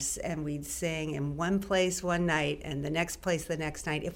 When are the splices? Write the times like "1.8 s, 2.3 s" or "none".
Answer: none